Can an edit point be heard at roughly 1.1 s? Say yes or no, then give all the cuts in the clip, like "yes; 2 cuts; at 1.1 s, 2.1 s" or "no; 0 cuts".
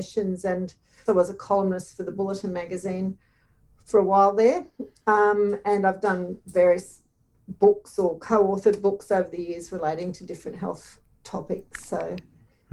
yes; 1 cut; at 1.1 s